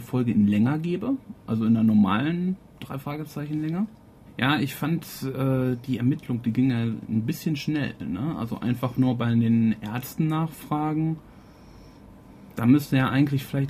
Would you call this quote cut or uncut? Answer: cut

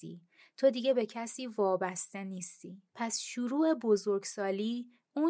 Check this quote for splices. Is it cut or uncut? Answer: cut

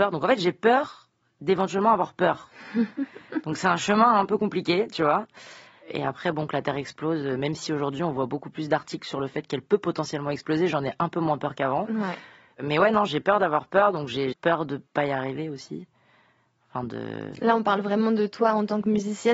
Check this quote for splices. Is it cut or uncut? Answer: cut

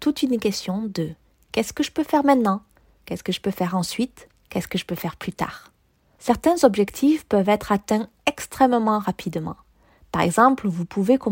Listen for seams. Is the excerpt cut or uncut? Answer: uncut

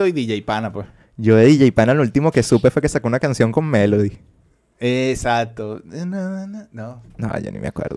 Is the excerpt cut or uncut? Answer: uncut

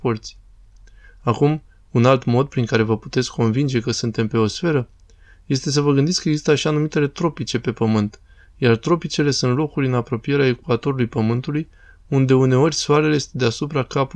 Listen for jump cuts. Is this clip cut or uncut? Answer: uncut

